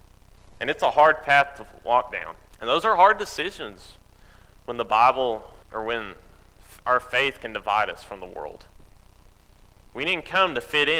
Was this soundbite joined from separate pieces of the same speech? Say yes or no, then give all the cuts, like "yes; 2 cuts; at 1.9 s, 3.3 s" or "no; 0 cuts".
yes; 3 cuts; at 2.5 s, 5.6 s, 9.9 s